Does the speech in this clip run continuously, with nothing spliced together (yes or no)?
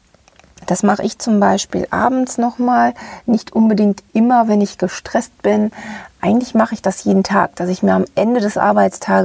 no